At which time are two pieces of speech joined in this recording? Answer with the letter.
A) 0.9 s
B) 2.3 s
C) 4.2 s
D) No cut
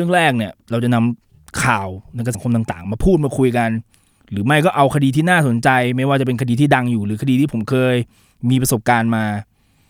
B